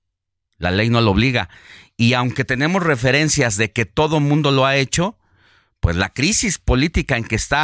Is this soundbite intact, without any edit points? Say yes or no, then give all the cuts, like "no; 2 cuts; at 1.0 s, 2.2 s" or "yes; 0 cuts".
yes; 0 cuts